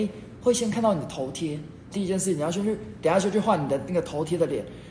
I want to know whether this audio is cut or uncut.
cut